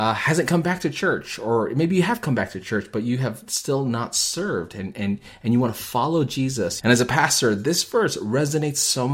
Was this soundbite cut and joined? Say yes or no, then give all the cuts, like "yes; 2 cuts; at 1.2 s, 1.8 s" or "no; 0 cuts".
yes; 1 cut; at 6.8 s